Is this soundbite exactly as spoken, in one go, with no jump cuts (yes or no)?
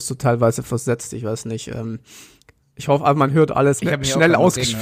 no